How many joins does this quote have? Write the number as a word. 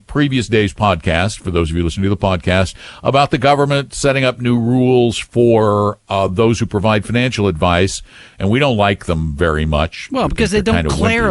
zero